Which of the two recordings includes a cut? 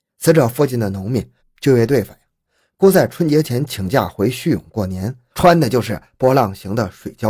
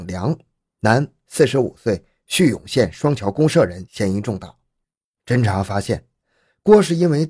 first; 2 cuts; at 1.4 s, 5.3 s

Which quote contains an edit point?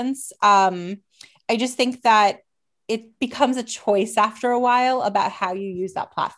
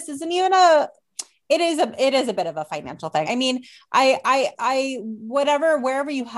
second; 1 cut; at 3.3 s

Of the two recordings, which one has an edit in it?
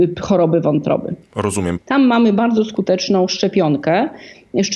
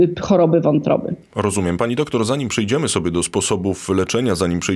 first; 1 cut; at 1.8 s

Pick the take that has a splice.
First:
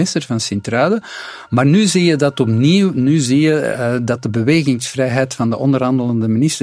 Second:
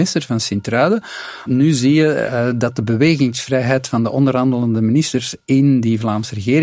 second; 1 cut; at 1.5 s

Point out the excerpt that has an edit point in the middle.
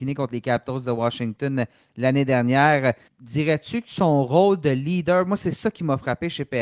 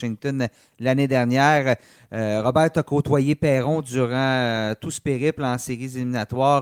first; 1 cut; at 3.1 s

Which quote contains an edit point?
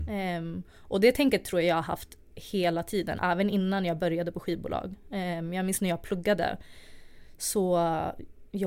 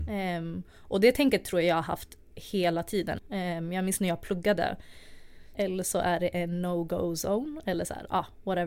second; 2 cuts; at 3.2 s, 5.5 s

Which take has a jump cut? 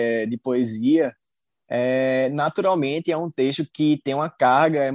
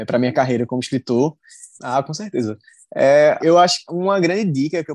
second; 2 cuts; at 1.8 s, 3.4 s

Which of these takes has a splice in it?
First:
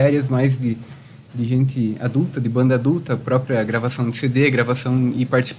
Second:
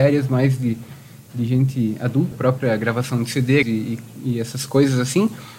second; 2 cuts; at 2.3 s, 3.6 s

